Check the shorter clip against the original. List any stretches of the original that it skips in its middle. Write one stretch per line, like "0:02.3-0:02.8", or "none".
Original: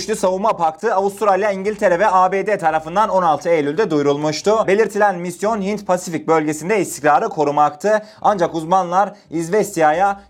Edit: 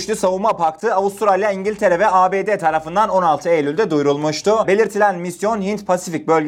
none